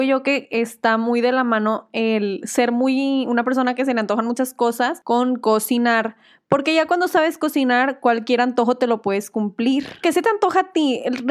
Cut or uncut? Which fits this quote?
uncut